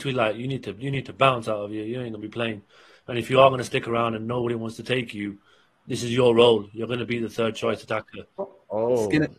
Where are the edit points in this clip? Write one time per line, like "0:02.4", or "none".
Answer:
0:08.4

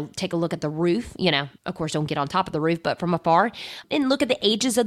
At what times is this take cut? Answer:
0:01.6

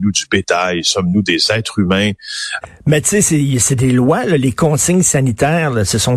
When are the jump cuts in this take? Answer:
0:02.6

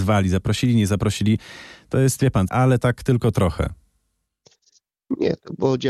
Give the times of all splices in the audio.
0:02.5

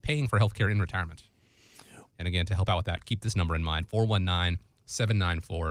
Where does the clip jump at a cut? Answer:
0:02.1

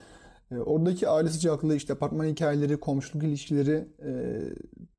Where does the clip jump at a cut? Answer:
none

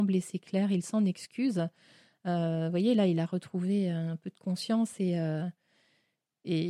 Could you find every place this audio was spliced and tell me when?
none

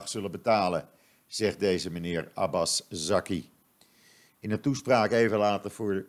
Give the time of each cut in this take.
0:04.3

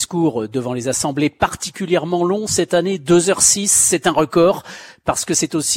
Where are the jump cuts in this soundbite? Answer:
none

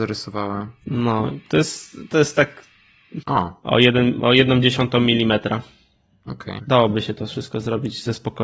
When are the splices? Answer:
0:03.2
0:06.6

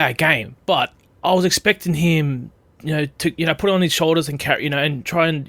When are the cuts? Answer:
none

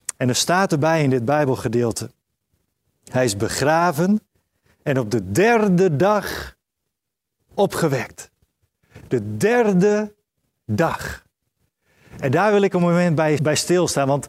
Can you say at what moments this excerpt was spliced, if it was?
0:13.4

